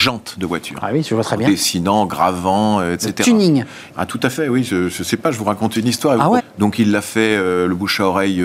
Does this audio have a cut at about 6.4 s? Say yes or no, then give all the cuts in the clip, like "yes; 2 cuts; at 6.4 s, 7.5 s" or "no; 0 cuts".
yes; 2 cuts; at 3.9 s, 6.4 s